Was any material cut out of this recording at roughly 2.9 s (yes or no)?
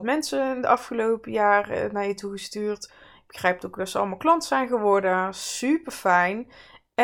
no